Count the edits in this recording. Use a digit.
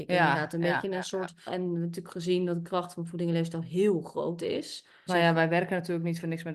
2